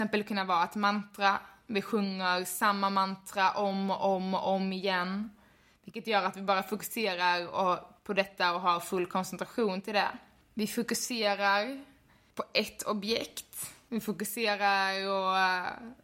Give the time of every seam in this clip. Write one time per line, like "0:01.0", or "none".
0:10.4